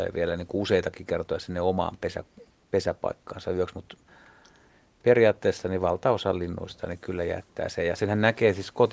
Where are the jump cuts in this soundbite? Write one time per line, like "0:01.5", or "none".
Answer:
none